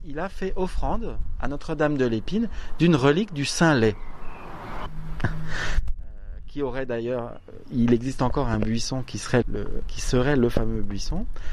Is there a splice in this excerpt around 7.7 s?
no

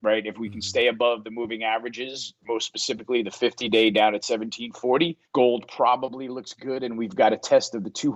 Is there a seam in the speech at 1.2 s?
no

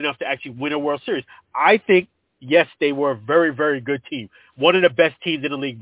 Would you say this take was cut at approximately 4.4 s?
no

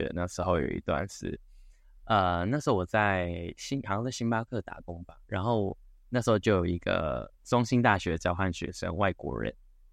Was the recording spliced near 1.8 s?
no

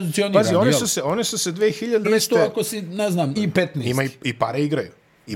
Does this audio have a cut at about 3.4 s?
yes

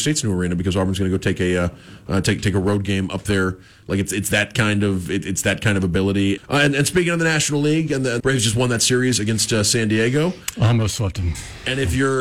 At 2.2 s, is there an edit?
no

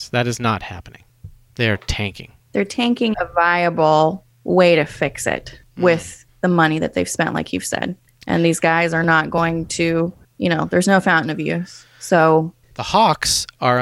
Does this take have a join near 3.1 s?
yes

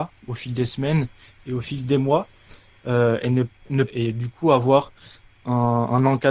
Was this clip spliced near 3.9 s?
yes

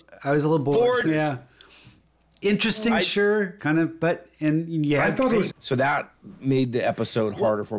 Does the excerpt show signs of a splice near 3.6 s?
yes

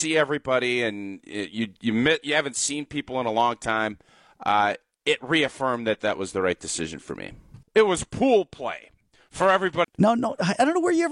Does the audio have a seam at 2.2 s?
no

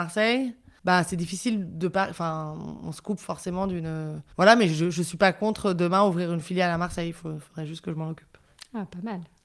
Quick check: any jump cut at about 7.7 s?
no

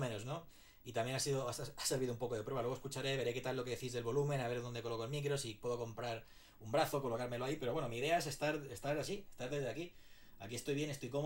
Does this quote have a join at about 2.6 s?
no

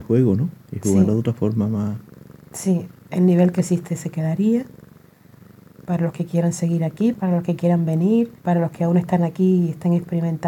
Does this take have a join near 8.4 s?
yes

